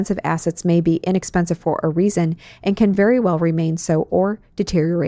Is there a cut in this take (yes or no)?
no